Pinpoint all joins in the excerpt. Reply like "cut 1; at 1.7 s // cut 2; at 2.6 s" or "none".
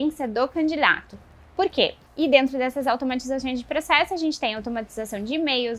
cut 1; at 2.0 s